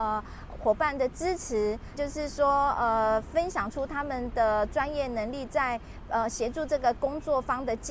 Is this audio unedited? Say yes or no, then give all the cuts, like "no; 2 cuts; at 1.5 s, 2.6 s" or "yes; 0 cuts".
no; 1 cut; at 1.9 s